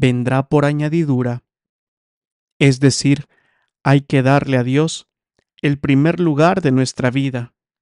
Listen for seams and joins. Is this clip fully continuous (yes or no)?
yes